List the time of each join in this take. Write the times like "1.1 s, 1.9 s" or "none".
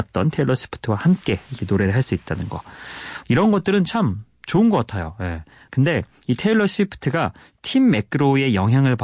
3.2 s, 5.7 s